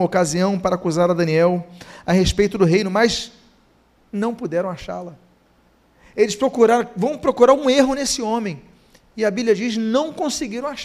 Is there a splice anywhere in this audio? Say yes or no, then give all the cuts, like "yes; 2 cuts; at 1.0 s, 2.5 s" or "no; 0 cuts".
no; 0 cuts